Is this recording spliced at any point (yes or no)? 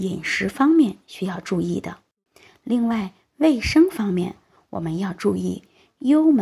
no